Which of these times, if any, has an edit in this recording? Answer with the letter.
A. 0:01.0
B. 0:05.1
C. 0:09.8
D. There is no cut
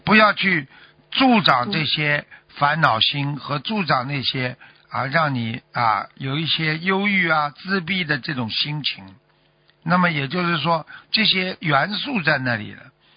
C